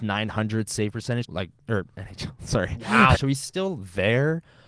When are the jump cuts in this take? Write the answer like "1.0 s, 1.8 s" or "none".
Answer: 1.2 s, 3.1 s

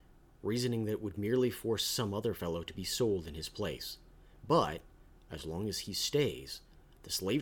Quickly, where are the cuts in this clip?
none

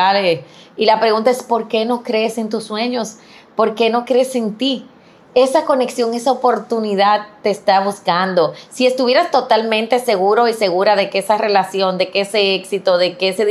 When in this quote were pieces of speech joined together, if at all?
none

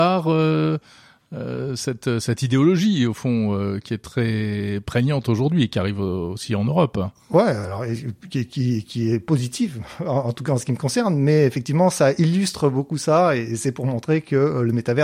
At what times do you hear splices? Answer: none

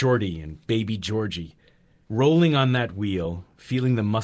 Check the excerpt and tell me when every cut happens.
2.1 s

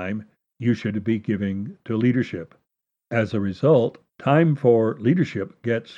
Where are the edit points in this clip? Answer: 3.0 s, 4.1 s

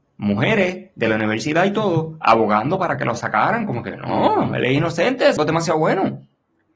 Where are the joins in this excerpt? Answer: 5.4 s

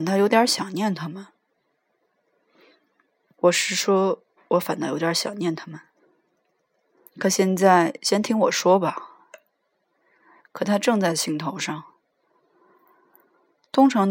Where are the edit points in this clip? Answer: 7.1 s, 10.4 s

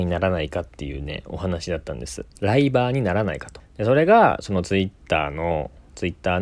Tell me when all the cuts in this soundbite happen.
2.3 s

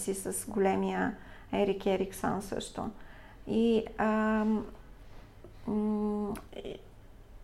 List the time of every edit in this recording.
none

